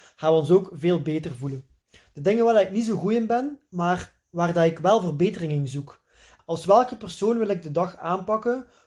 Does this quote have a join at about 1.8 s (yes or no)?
yes